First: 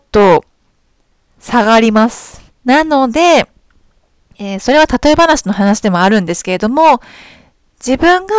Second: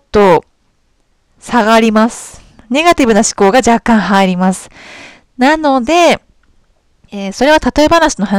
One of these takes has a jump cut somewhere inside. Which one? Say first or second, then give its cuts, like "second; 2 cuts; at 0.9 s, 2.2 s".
first; 1 cut; at 2.5 s